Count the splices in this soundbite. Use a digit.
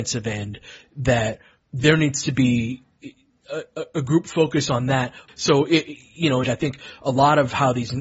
2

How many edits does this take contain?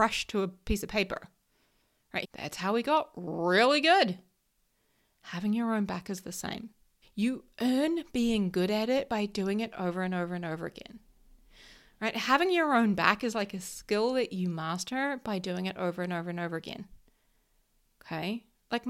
2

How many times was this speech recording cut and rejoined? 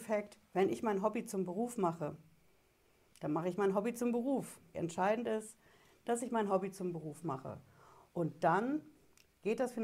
1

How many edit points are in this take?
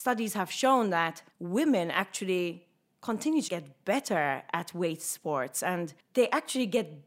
2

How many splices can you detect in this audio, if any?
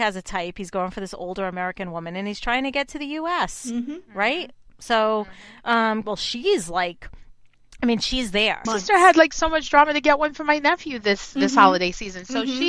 2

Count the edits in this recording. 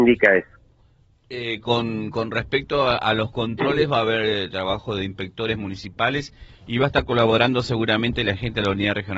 0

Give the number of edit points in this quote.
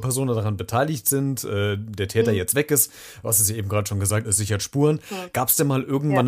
1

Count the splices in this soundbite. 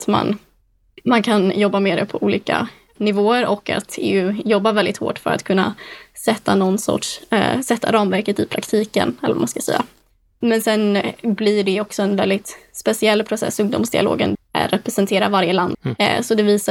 2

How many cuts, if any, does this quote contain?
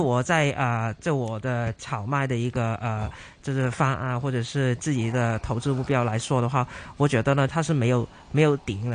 1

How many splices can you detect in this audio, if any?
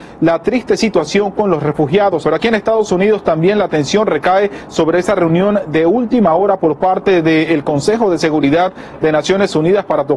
1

